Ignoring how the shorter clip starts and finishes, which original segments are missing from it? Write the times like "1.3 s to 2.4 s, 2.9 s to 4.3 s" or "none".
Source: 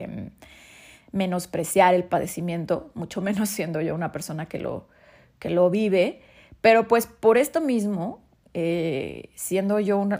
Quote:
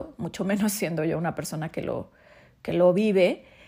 none

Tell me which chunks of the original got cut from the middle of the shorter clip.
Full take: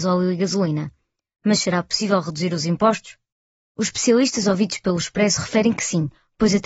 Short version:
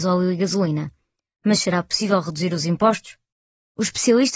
none

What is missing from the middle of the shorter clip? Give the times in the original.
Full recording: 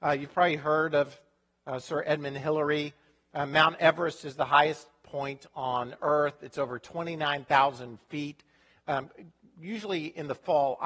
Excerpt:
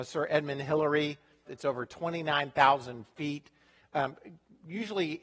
3.2 s to 6.4 s

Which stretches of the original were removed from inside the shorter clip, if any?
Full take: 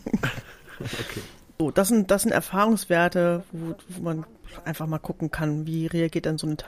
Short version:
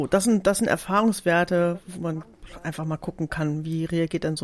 3.5 s to 3.8 s

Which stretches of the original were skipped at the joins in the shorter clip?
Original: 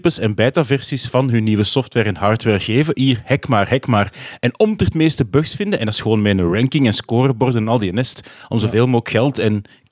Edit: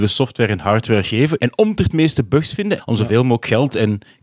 2.9 s to 4.4 s, 5.8 s to 8.4 s

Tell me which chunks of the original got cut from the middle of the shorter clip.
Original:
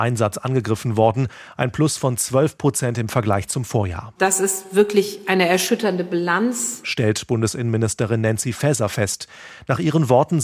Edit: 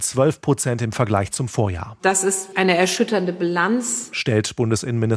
4.7 s to 5.2 s

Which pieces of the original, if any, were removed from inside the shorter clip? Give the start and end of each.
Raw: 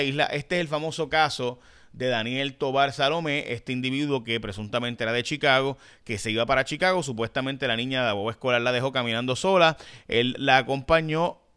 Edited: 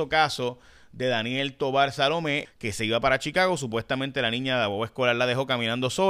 3.5 s to 5.9 s

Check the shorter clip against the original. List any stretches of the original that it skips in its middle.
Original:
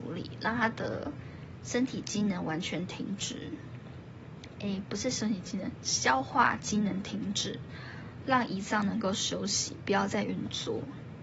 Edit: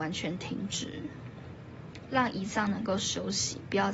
4.6 s to 8.2 s

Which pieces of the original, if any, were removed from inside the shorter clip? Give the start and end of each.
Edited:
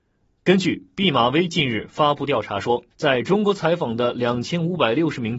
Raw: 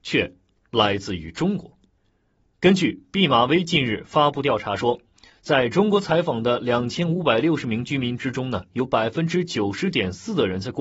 5.1 s to 5.4 s

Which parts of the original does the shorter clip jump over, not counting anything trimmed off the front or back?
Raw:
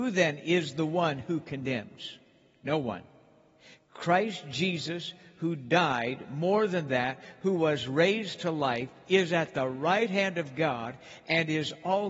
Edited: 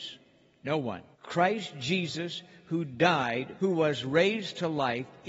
3.1 s to 3.8 s, 6.3 s to 7.4 s

